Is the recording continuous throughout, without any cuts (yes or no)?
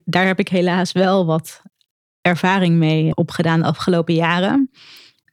no